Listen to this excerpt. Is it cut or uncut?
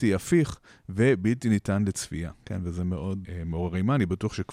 cut